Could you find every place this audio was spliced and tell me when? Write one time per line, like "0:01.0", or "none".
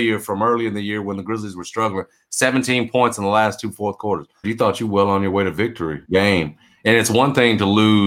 0:04.4
0:06.0